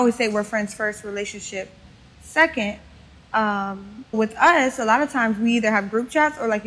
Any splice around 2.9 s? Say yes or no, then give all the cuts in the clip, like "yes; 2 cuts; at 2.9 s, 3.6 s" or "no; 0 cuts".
no; 1 cut; at 4.1 s